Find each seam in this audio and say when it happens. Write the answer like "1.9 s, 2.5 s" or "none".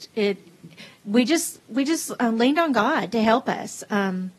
none